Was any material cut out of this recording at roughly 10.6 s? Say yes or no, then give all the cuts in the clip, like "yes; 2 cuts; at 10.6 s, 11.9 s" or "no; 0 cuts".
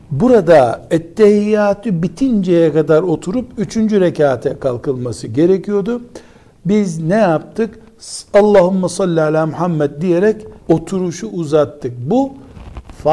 yes; 1 cut; at 10.6 s